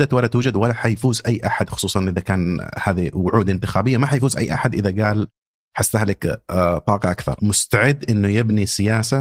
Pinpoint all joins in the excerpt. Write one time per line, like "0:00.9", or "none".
0:07.4